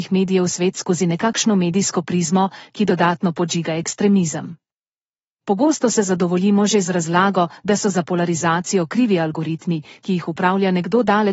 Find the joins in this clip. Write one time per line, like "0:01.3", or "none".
0:05.4